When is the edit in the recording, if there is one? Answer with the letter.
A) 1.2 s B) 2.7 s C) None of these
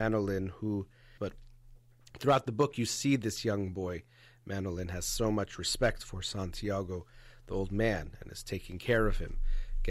A